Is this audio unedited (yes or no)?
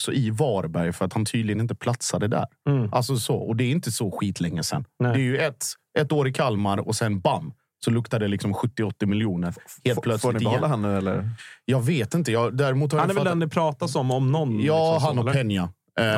yes